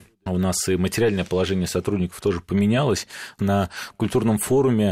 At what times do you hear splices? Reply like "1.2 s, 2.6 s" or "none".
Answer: 3.4 s